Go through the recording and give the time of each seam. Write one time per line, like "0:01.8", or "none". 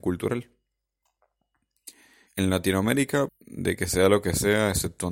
0:02.3
0:03.3